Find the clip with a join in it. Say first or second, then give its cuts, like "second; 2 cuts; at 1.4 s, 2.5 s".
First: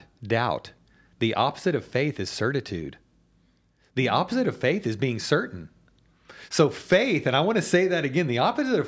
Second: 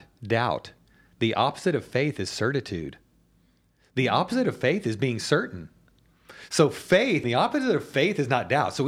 second; 1 cut; at 7.2 s